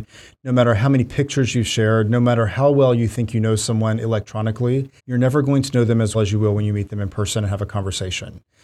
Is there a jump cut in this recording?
yes; 2 cuts; at 5.0 s, 6.1 s

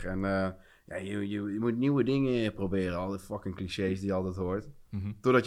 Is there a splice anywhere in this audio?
no; 0 cuts

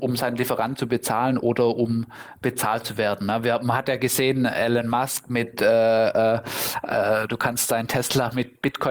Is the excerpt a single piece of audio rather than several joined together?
yes; 0 cuts

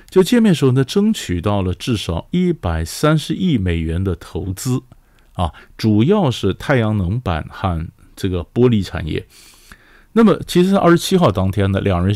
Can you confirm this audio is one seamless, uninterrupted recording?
yes; 0 cuts

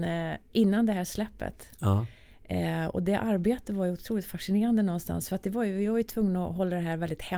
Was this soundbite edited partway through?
no; 0 cuts

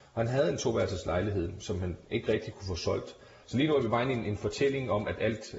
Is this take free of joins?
no; 1 cut; at 3.4 s

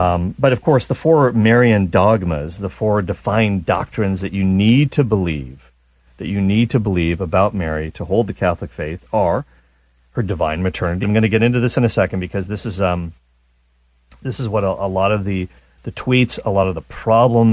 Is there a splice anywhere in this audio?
yes; 1 cut; at 11.0 s

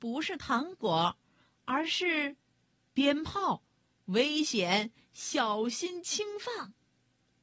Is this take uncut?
yes; 0 cuts

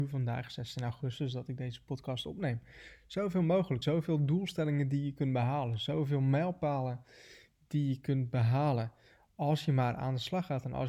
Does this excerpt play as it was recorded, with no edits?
no; 1 cut; at 3.8 s

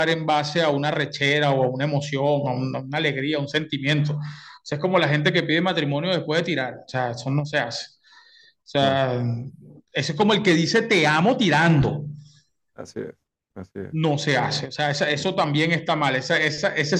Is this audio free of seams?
yes; 0 cuts

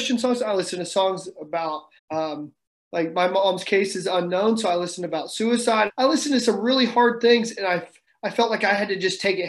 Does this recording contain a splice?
yes; 2 cuts; at 2.0 s, 5.9 s

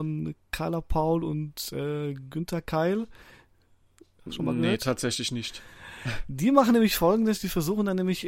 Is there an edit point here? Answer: no; 0 cuts

